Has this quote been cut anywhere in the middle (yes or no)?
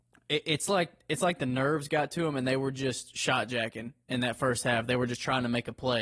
no